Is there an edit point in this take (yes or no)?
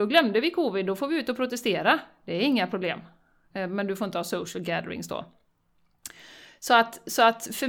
no